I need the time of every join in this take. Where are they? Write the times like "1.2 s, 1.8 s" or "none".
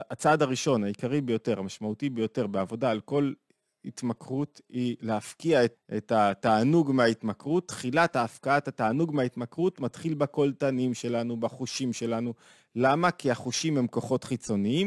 5.7 s